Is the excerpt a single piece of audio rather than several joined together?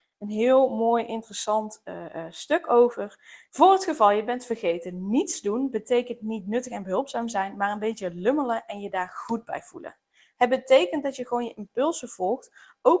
no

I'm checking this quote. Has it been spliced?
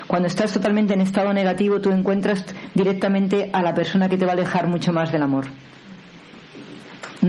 no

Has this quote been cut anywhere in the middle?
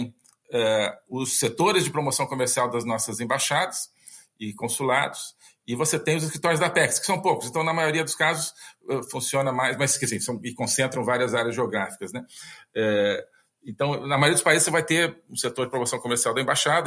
no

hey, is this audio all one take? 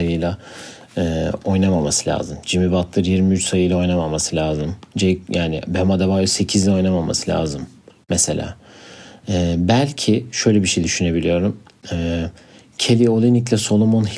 yes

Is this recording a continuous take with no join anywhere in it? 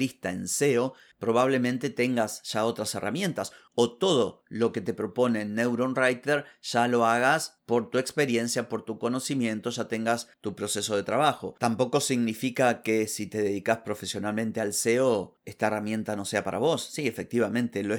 yes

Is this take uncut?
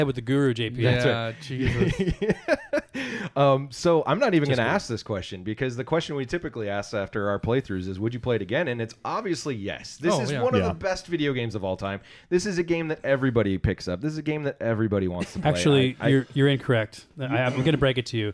yes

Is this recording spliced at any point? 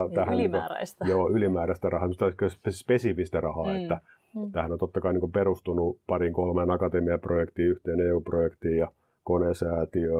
no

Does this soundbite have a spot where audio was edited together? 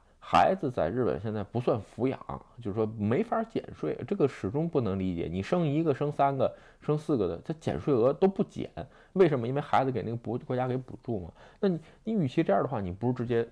no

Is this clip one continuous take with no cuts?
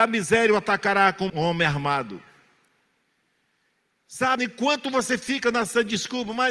no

